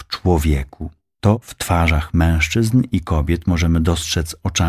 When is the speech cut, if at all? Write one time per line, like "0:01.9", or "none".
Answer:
0:01.1